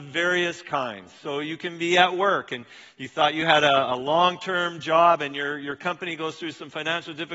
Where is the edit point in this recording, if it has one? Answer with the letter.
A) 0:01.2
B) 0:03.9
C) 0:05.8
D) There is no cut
D